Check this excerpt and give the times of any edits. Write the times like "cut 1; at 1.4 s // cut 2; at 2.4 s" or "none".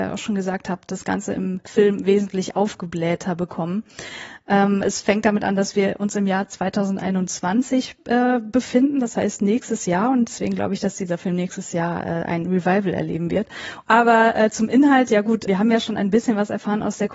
cut 1; at 13.8 s // cut 2; at 15.5 s

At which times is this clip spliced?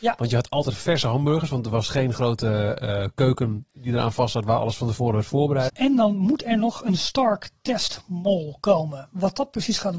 cut 1; at 5.7 s

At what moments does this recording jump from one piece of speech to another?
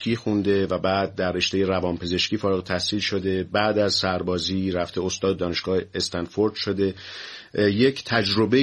cut 1; at 5.4 s

